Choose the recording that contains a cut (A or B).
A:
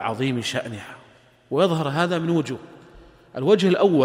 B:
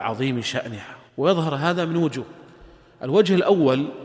B